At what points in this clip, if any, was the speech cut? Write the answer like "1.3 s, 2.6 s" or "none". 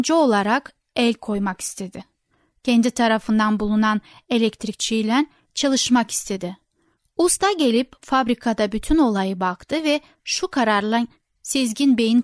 none

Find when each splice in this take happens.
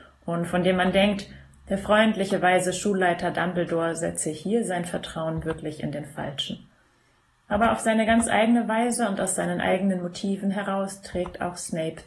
none

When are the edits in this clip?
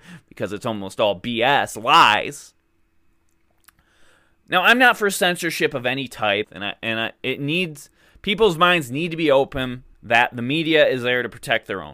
6.4 s, 9.9 s

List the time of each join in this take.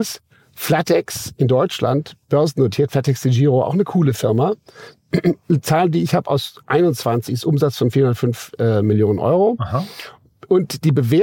none

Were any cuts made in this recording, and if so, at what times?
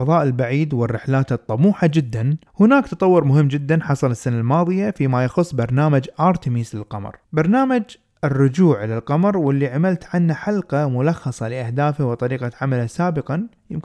2.5 s, 7.2 s

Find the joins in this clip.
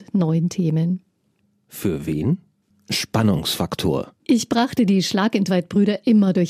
2.7 s, 4.2 s

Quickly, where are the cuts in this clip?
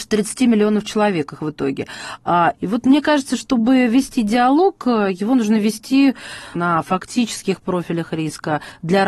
2.5 s, 6.5 s

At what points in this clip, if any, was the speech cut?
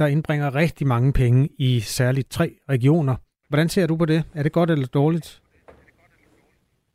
3.4 s

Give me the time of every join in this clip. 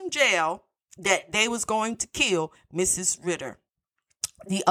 none

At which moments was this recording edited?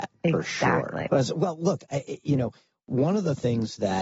1.1 s

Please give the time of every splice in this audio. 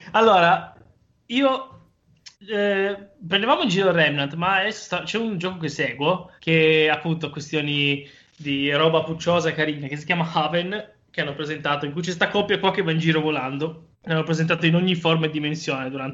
2.3 s, 6.4 s, 13.9 s

